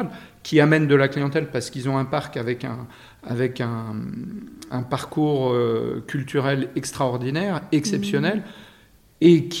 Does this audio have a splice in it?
yes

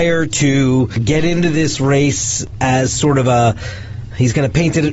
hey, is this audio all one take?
yes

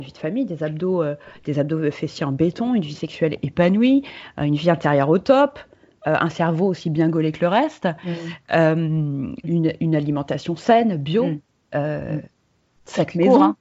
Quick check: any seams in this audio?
yes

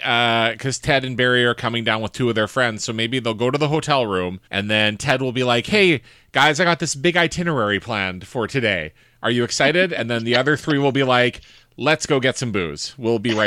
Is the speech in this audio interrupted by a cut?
yes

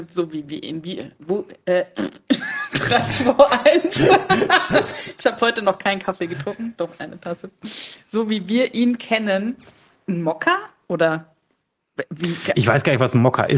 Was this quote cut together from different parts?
no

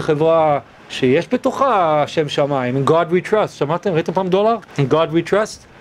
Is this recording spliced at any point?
yes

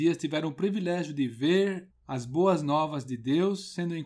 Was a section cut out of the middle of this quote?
yes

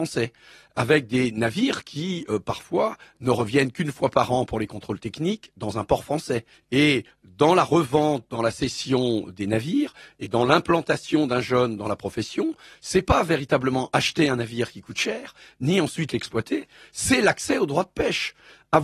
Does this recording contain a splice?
yes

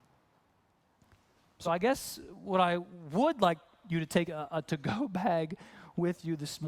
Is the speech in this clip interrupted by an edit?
no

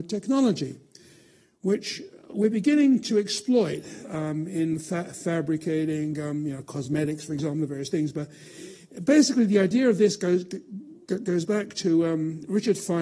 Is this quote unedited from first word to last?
yes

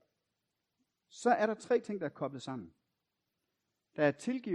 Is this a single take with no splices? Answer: yes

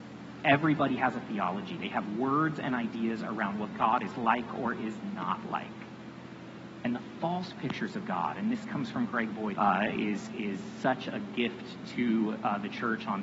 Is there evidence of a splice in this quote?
yes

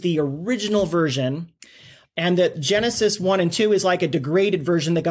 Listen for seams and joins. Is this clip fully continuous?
no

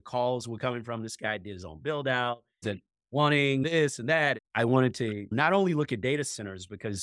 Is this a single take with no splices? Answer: no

